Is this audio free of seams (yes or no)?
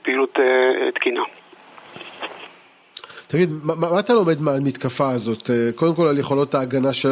yes